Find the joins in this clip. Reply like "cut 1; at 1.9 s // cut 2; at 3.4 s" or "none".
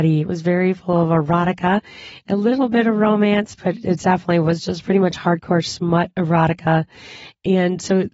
none

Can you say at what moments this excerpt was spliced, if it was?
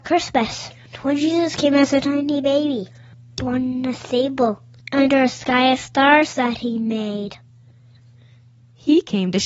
none

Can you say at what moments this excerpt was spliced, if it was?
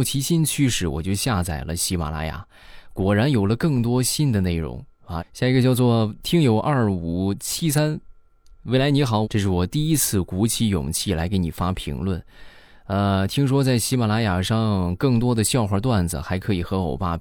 cut 1; at 5.2 s // cut 2; at 9.2 s

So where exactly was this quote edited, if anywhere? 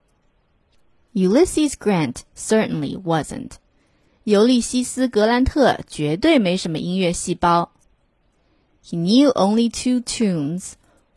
none

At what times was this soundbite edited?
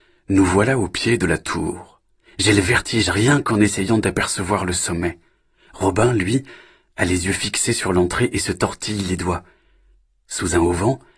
none

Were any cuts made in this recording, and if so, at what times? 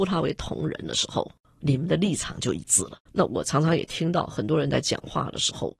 cut 1; at 3.1 s

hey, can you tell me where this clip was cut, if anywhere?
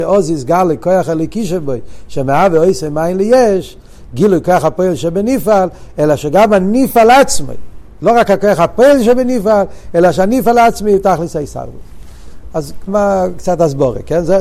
cut 1; at 12.9 s

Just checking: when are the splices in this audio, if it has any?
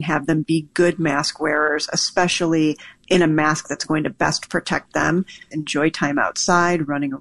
cut 1; at 5.5 s

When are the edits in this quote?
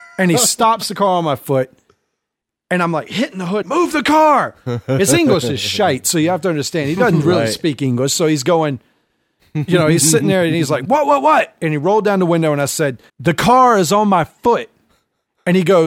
cut 1; at 3.6 s // cut 2; at 13.1 s

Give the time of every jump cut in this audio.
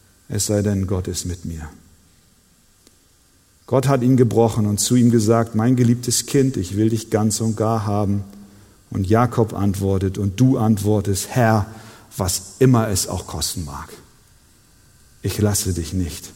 none

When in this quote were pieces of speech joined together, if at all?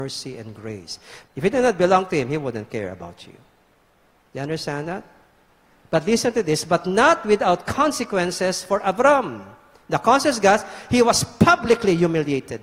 cut 1; at 1.2 s

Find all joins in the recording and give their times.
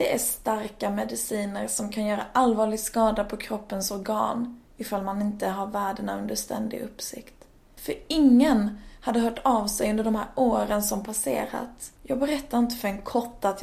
cut 1; at 7.6 s // cut 2; at 12.0 s

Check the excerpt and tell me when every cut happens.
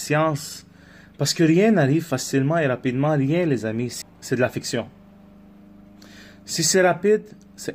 cut 1; at 4.0 s

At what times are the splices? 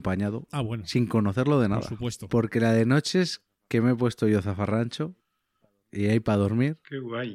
none

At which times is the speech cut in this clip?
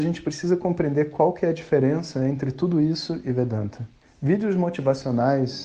cut 1; at 4.0 s

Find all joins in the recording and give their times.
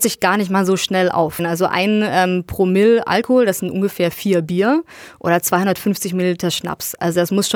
cut 1; at 1.4 s

